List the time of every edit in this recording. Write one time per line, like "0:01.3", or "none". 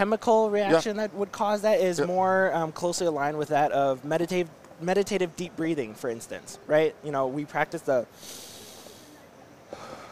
none